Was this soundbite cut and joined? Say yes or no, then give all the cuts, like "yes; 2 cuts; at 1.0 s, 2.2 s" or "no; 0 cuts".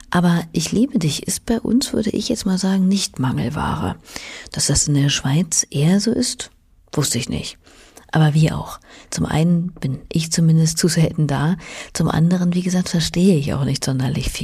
no; 0 cuts